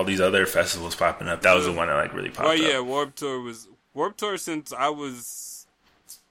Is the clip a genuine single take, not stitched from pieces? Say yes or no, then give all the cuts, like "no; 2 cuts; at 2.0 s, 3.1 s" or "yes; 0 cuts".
no; 1 cut; at 1.4 s